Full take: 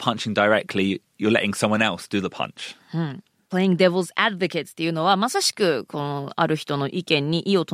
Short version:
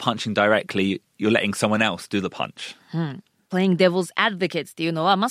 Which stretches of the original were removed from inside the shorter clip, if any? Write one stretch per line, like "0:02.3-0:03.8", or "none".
none